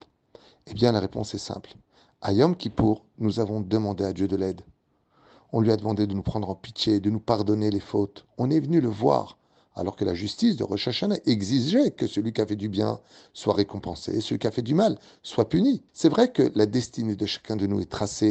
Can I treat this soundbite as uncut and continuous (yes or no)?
no